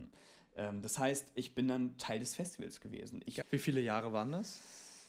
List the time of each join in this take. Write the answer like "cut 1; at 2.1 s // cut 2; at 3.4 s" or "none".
cut 1; at 3.4 s